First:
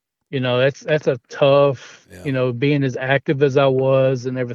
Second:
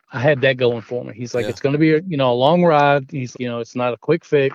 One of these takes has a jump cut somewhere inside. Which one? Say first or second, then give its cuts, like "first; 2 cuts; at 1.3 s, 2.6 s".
second; 1 cut; at 3.3 s